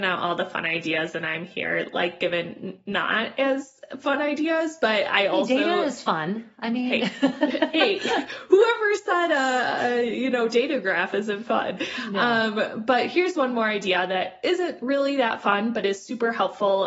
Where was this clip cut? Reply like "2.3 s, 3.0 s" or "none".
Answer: none